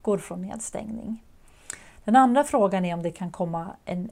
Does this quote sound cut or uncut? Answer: uncut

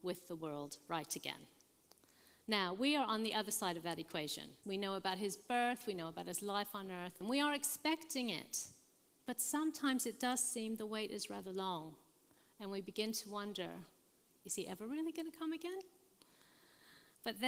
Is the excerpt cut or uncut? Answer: cut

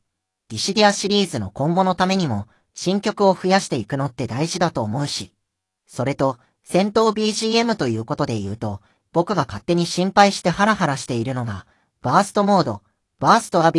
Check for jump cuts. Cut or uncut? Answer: uncut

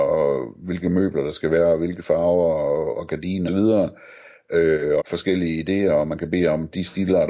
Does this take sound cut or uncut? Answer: cut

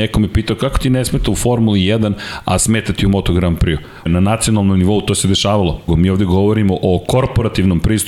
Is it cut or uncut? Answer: cut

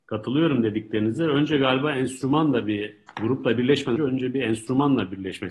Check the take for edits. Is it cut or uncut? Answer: cut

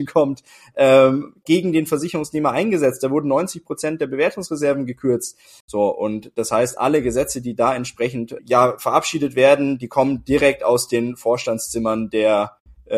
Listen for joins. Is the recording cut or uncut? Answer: cut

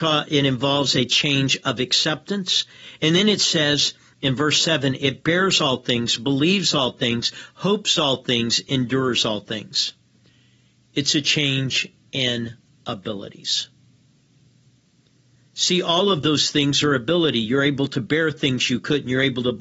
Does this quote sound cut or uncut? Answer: uncut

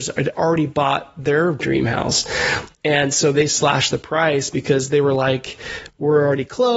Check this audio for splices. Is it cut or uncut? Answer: uncut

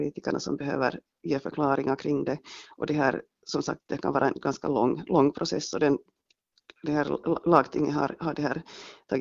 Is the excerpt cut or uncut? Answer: uncut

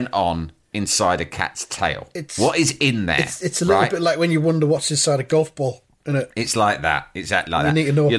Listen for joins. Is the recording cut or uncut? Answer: cut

